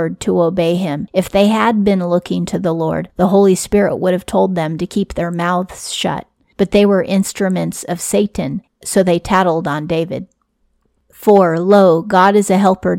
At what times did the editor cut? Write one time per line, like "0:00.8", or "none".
none